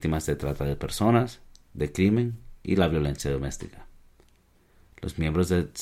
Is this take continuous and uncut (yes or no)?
yes